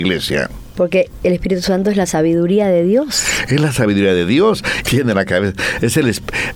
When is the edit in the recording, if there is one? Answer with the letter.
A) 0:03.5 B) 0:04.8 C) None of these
B